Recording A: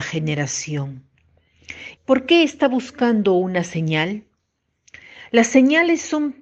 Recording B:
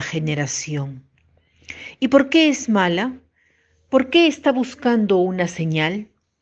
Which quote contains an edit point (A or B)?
A